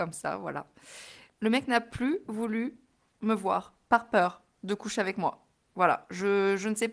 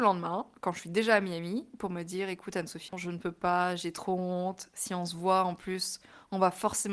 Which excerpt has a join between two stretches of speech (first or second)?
second